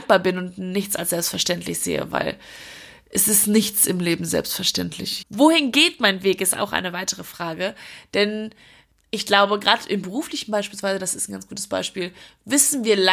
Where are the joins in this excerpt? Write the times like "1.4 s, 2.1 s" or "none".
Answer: 5.2 s